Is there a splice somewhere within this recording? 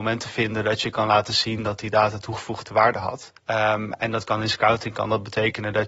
yes; 1 cut; at 3.4 s

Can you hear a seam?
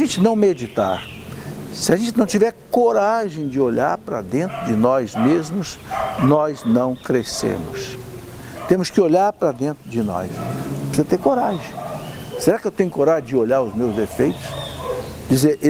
no; 0 cuts

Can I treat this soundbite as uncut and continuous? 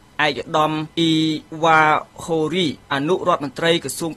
no; 1 cut; at 2.8 s

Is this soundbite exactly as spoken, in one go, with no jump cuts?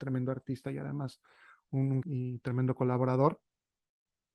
no; 1 cut; at 2.0 s

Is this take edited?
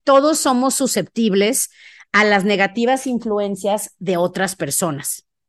no; 0 cuts

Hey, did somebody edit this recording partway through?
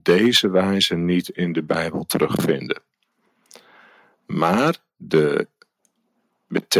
no; 0 cuts

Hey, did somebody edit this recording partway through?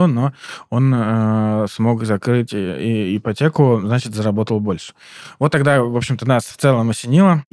no; 0 cuts

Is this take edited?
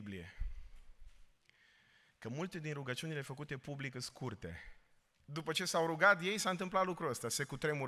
yes; 1 cut; at 5.2 s

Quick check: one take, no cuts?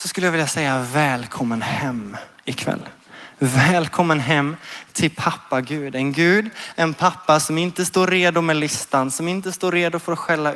yes; 0 cuts

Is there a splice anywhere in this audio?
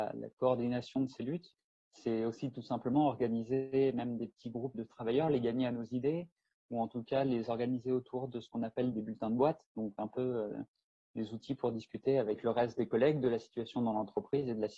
yes; 2 cuts; at 4.7 s, 8.9 s

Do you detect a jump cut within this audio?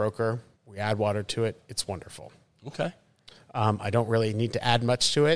no; 0 cuts

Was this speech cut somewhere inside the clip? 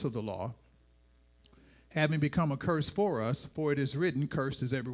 no; 0 cuts

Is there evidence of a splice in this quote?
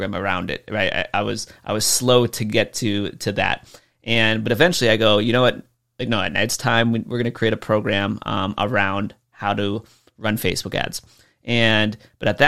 no; 0 cuts

